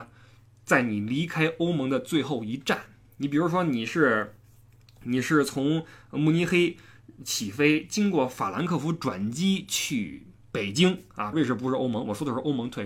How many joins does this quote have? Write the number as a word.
one